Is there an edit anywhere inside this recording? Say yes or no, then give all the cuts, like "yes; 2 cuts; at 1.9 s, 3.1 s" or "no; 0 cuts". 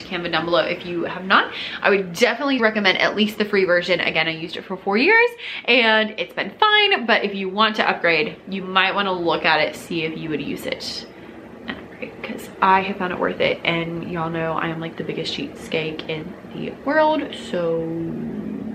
yes; 1 cut; at 2.6 s